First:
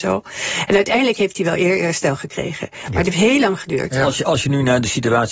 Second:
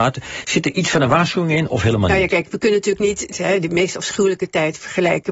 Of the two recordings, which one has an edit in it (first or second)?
second